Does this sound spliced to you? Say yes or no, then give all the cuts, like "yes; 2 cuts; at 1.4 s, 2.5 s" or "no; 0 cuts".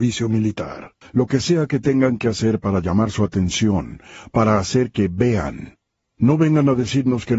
yes; 2 cuts; at 1.0 s, 6.0 s